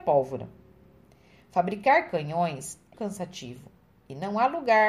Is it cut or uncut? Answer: cut